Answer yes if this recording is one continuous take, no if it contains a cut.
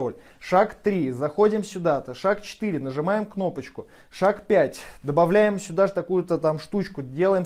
yes